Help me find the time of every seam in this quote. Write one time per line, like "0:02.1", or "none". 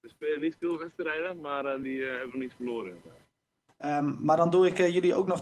0:01.8
0:03.7